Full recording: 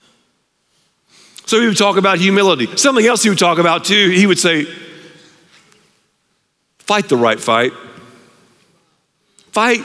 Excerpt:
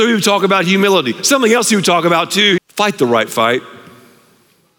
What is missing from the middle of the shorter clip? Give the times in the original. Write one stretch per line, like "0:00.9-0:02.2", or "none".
0:04.1-0:06.7